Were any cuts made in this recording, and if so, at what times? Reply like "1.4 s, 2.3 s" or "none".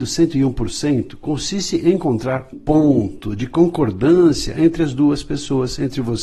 2.5 s